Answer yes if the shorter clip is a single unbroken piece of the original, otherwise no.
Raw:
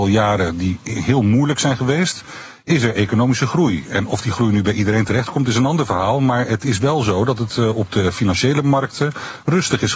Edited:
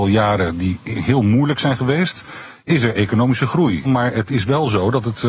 no